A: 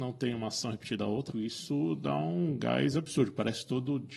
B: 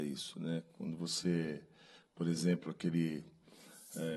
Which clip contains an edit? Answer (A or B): A